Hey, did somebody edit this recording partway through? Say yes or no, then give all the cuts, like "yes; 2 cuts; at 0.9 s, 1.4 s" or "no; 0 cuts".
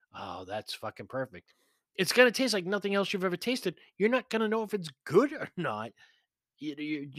no; 0 cuts